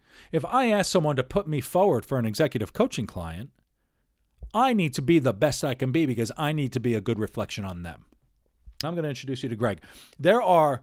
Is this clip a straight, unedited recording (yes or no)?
no